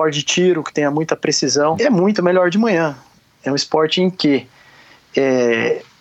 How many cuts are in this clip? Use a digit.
1